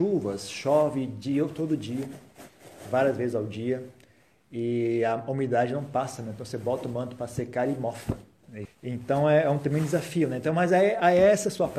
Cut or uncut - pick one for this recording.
cut